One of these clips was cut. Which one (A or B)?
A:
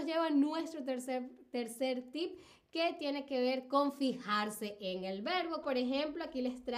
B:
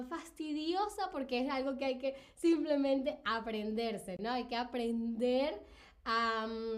A